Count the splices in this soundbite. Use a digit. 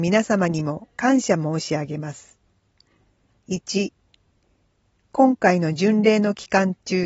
1